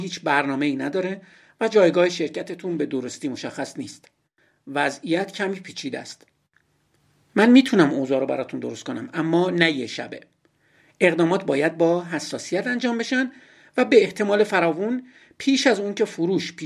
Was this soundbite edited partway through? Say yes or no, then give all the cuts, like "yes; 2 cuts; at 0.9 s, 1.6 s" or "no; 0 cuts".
no; 0 cuts